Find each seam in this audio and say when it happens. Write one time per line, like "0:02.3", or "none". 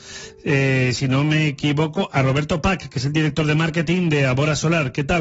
none